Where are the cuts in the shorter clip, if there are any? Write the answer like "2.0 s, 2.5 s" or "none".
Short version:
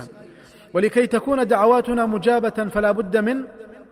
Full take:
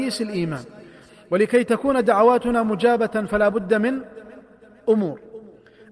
none